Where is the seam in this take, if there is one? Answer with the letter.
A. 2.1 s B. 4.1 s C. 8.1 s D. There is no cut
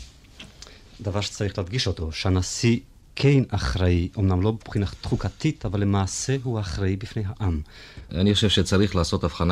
C